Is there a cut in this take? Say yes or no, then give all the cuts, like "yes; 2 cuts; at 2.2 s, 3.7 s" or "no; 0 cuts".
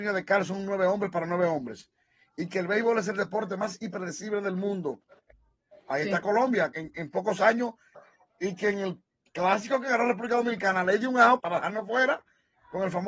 yes; 3 cuts; at 6.7 s, 7.9 s, 11.4 s